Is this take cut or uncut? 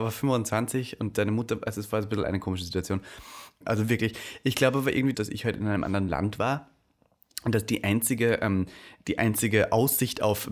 cut